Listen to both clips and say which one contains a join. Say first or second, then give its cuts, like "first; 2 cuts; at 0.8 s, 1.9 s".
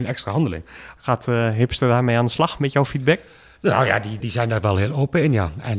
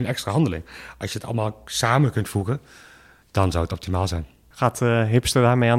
first; 2 cuts; at 1.0 s, 4.2 s